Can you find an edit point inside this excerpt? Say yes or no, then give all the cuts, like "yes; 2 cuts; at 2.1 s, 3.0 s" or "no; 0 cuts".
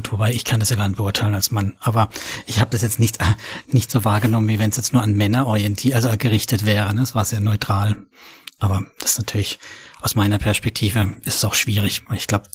no; 0 cuts